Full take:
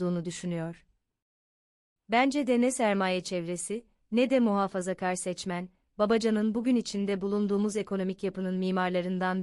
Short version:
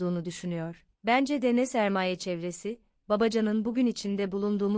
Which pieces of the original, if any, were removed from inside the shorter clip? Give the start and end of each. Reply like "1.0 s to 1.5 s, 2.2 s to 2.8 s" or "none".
0.9 s to 2.0 s, 4.0 s to 5.9 s

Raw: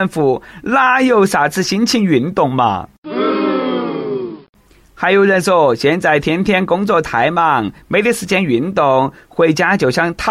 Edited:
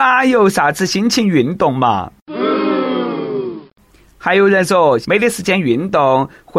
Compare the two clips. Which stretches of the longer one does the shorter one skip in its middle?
5.8 s to 7.8 s

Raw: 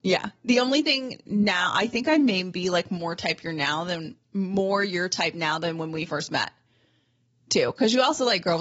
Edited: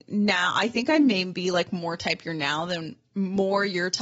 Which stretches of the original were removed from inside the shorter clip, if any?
none

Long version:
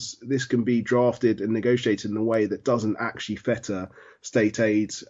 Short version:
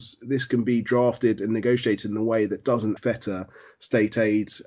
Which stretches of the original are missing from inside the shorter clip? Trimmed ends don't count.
3.0 s to 3.4 s

